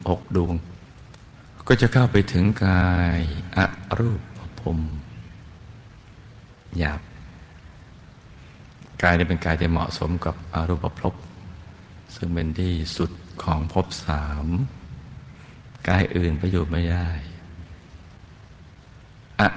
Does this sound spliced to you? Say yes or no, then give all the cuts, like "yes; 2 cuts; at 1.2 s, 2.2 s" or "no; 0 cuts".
no; 0 cuts